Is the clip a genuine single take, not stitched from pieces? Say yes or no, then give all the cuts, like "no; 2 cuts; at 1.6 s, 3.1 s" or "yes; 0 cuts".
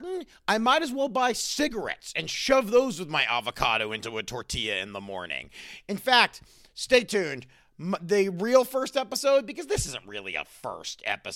yes; 0 cuts